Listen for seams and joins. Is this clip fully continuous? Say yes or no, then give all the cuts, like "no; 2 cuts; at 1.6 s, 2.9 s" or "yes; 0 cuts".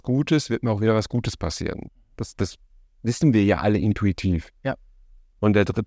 yes; 0 cuts